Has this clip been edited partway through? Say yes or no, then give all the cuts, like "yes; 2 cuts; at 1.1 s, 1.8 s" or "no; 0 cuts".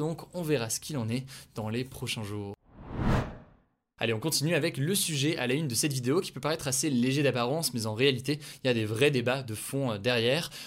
no; 0 cuts